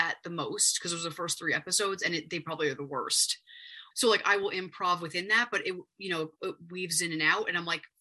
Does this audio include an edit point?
yes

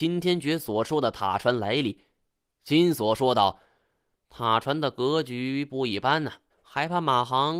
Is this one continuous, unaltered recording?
no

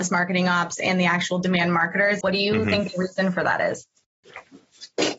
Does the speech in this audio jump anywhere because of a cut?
yes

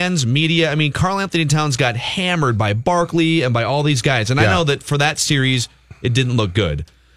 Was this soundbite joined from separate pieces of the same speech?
no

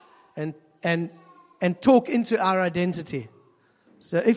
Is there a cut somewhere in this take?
no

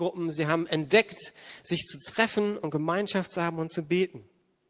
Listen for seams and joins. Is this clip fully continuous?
yes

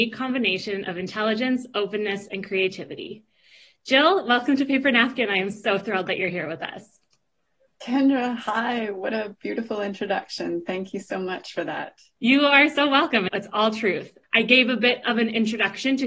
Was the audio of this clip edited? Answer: no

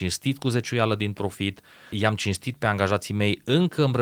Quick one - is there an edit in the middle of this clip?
yes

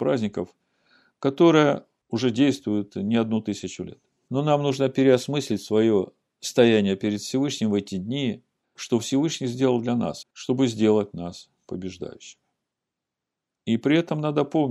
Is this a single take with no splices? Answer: no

